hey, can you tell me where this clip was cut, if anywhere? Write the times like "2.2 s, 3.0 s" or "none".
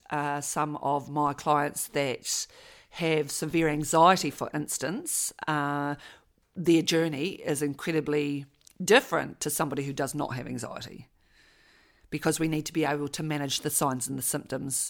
none